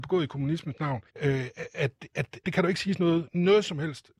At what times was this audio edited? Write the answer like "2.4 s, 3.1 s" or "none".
1.1 s, 2.4 s